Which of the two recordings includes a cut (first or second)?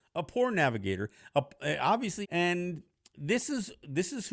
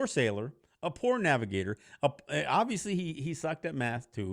first